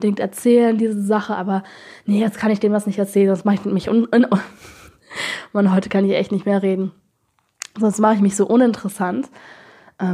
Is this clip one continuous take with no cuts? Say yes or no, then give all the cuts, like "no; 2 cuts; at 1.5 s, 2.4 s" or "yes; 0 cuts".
yes; 0 cuts